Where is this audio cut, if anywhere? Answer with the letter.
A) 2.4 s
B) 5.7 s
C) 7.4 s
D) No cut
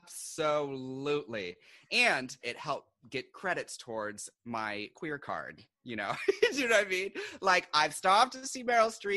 A